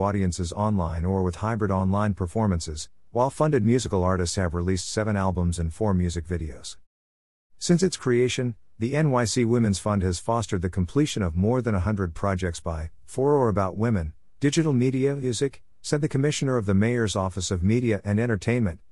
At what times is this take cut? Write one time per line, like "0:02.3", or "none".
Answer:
0:14.3
0:15.8